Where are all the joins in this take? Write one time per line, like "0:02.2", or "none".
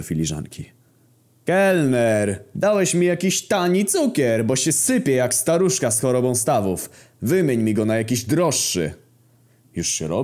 0:02.5

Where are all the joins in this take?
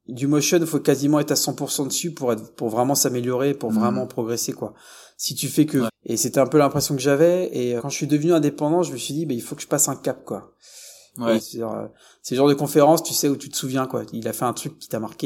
0:05.9
0:07.8
0:11.4

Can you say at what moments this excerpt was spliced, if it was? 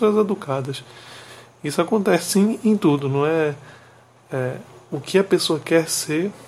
none

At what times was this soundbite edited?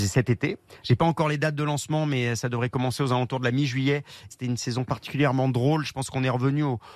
0:04.3

